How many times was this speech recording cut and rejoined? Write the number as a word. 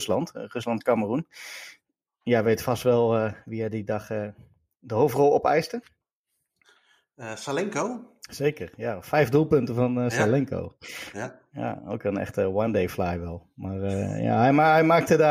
zero